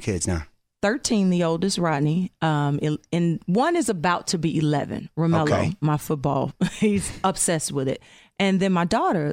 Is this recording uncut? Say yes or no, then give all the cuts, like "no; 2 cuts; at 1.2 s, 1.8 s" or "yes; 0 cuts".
yes; 0 cuts